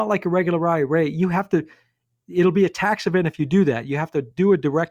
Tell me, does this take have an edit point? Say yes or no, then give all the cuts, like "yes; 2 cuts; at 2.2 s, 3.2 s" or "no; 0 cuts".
no; 0 cuts